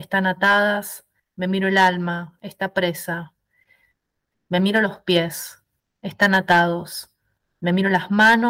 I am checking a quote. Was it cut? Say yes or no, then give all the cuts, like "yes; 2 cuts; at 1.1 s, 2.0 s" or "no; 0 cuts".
yes; 2 cuts; at 1.2 s, 4.3 s